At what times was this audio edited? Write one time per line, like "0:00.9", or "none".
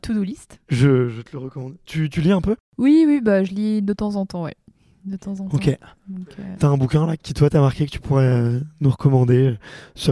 0:06.6